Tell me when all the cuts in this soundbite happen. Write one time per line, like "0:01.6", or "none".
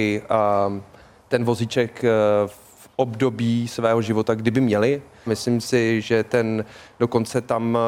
0:05.3

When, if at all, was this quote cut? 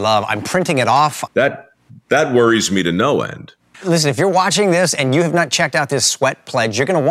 0:01.3
0:03.7

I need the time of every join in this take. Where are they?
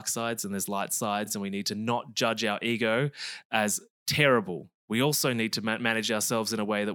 none

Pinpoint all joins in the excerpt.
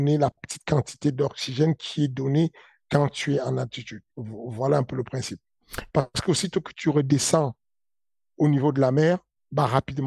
0:05.9

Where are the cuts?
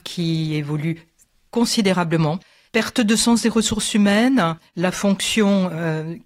0:02.7

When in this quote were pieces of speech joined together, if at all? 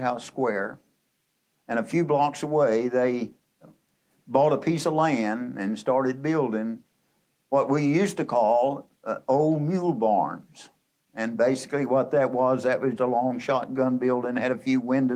0:13.0

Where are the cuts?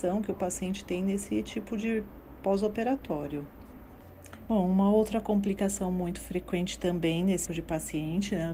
0:04.5
0:07.5

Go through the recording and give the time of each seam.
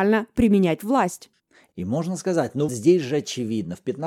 0:02.7

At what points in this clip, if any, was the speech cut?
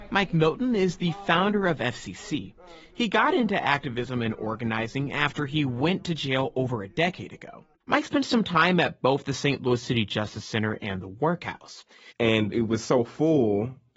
0:07.7
0:12.1

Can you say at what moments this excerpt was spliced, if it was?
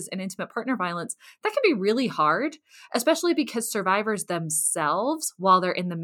none

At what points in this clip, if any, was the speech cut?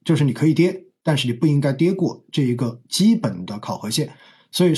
none

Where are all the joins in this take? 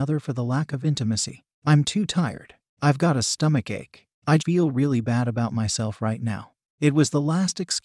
0:04.4
0:06.7

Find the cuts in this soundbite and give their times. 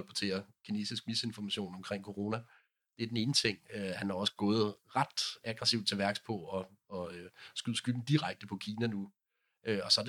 none

